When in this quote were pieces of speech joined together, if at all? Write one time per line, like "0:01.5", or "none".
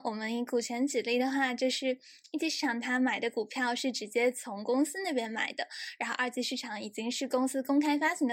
none